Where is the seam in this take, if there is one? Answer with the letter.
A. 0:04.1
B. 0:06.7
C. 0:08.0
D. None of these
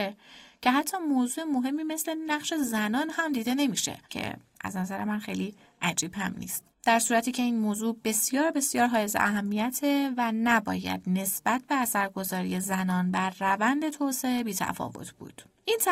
A